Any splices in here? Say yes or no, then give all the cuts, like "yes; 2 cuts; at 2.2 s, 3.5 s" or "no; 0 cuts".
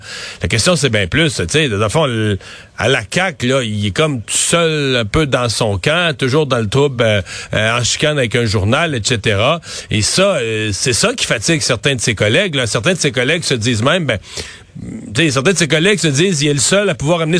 no; 0 cuts